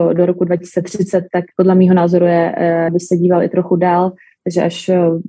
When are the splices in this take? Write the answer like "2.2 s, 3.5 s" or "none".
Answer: 1.5 s, 2.9 s